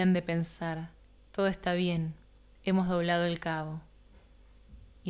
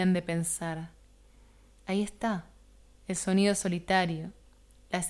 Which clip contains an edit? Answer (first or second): first